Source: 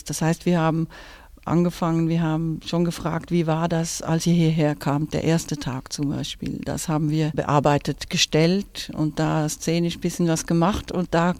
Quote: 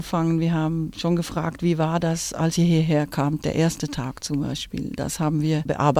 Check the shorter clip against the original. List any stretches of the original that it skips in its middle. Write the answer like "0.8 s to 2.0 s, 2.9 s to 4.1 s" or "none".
none